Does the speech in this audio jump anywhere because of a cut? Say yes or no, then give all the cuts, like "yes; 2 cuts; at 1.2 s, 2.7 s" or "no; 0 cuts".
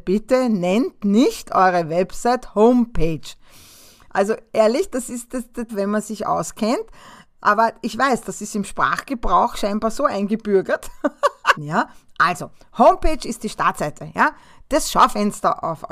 yes; 2 cuts; at 5.7 s, 11.5 s